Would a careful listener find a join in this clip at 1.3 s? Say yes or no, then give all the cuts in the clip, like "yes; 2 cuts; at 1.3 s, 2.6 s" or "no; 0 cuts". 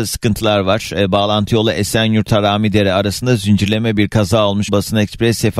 no; 1 cut; at 4.7 s